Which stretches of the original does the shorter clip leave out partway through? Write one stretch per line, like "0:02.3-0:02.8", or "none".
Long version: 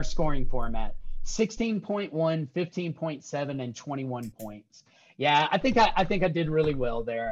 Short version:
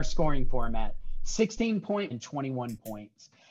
0:02.1-0:03.6